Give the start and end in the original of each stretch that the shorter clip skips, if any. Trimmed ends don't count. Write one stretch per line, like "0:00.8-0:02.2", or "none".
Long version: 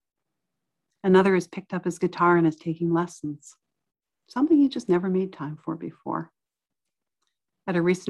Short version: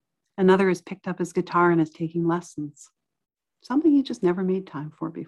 none